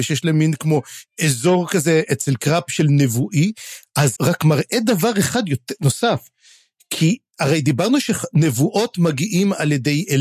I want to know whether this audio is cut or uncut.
cut